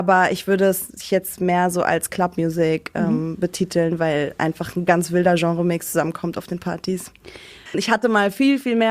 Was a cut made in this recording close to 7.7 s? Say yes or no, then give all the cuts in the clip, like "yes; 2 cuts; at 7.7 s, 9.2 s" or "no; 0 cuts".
yes; 1 cut; at 7.7 s